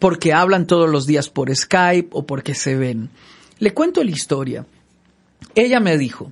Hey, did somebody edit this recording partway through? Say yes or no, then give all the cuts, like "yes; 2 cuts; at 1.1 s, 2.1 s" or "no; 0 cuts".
no; 0 cuts